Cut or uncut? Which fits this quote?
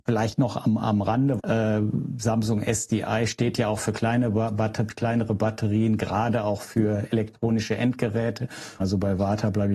cut